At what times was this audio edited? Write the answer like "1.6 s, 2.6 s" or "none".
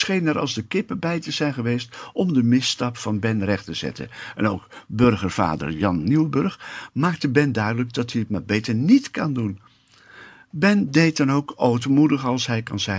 none